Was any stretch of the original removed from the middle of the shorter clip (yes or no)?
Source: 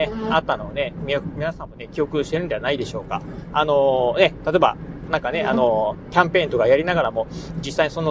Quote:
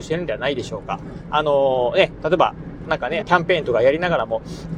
yes